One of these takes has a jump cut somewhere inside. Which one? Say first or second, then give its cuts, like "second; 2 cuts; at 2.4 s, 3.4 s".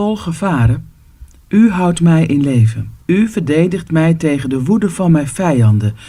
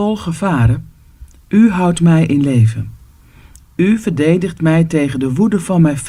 first; 1 cut; at 3.0 s